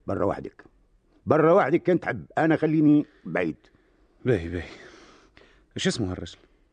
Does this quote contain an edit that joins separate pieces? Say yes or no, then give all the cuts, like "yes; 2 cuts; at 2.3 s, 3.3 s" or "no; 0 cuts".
no; 0 cuts